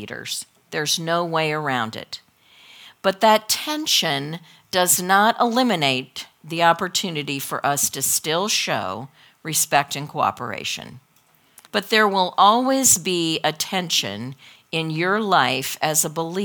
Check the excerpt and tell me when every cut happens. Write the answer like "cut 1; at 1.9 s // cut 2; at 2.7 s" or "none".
cut 1; at 11.7 s